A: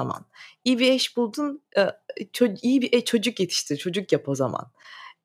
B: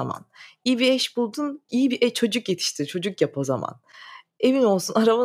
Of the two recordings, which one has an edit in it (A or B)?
B